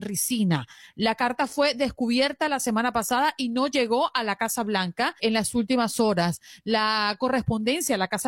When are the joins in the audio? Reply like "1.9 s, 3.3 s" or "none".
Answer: 5.2 s